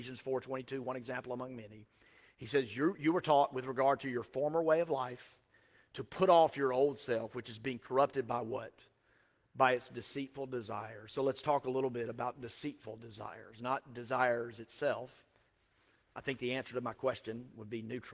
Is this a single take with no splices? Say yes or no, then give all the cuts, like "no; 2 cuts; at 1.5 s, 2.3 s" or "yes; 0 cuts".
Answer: yes; 0 cuts